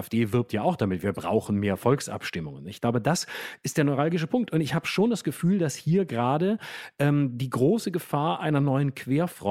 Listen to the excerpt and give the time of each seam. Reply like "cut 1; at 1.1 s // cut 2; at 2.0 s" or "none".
none